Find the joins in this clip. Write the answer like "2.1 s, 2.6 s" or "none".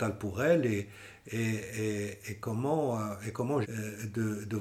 3.6 s